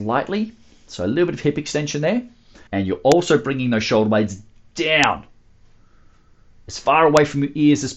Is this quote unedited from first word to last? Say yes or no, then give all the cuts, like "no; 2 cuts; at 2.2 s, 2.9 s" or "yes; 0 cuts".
no; 1 cut; at 2.7 s